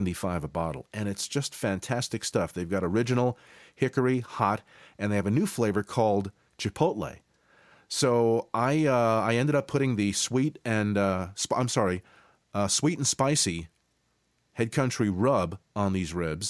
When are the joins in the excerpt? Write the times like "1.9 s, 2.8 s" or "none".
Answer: none